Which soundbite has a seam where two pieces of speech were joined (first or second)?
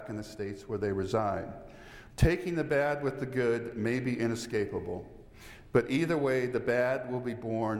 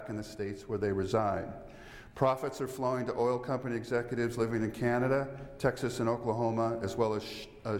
first